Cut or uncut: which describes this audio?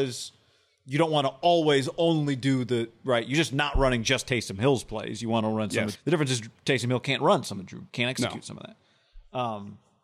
cut